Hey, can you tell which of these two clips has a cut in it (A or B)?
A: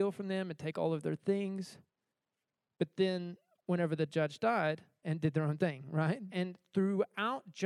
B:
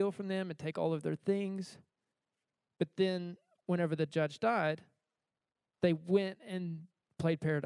A